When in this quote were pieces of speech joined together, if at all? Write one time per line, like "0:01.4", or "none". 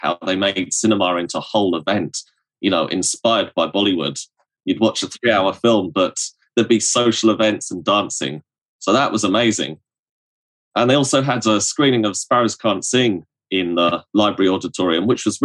none